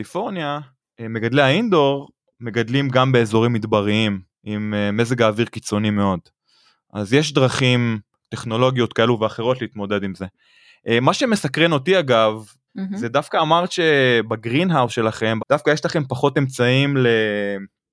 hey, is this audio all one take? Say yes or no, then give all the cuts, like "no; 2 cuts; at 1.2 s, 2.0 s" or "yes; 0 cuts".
no; 2 cuts; at 12.7 s, 15.4 s